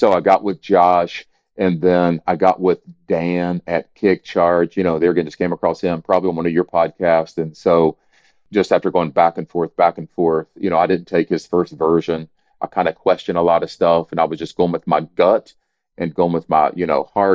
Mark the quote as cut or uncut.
uncut